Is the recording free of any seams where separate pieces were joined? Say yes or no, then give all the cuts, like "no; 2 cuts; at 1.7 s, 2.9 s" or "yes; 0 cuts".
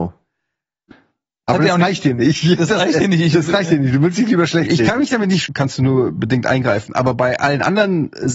no; 1 cut; at 5.5 s